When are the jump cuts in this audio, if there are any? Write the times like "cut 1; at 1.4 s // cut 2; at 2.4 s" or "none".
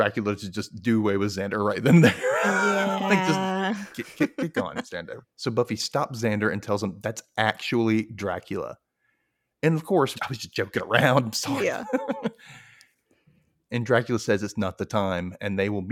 cut 1; at 5.2 s // cut 2; at 10.1 s